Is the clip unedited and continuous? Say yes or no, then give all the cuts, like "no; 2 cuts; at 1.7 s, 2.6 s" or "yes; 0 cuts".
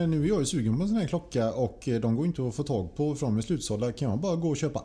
yes; 0 cuts